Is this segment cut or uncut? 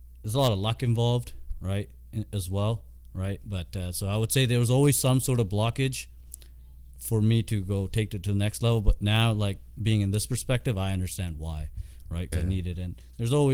cut